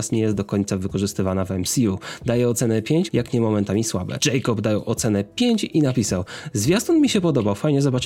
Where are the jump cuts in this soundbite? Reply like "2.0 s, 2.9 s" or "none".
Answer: 3.1 s, 4.2 s